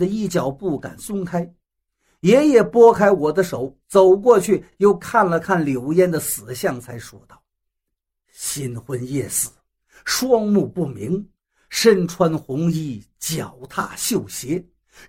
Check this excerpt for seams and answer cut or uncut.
uncut